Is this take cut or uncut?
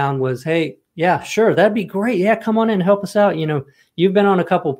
uncut